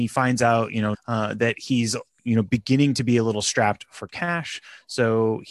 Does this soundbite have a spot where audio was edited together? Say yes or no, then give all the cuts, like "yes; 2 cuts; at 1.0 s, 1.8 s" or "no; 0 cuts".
yes; 1 cut; at 0.9 s